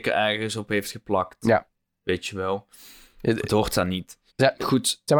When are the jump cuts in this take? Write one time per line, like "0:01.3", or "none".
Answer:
0:04.3